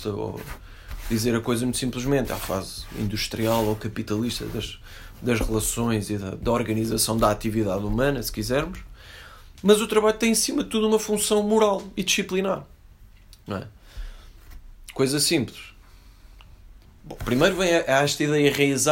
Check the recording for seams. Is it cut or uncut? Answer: uncut